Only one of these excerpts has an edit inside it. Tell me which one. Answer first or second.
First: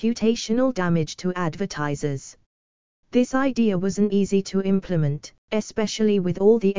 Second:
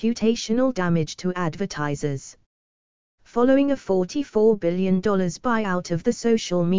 first